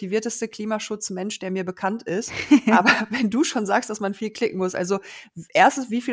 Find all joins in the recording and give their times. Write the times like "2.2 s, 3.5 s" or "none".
none